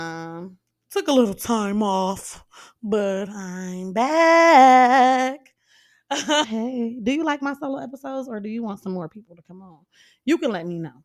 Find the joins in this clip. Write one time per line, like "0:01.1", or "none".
0:06.4